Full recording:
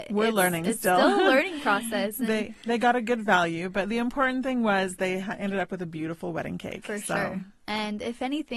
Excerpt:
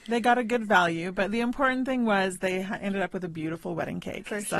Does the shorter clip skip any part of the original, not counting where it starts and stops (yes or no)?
no